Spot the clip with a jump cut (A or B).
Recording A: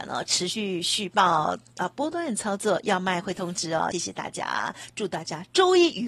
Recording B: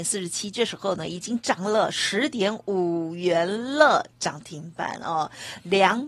A